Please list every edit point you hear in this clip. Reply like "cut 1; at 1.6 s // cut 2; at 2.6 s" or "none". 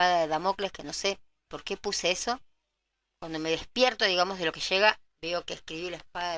cut 1; at 1.5 s